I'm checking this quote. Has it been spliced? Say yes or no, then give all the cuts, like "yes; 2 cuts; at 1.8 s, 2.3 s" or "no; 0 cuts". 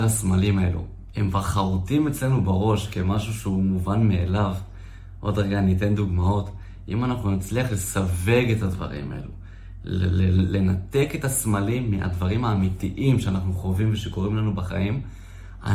yes; 1 cut; at 1.1 s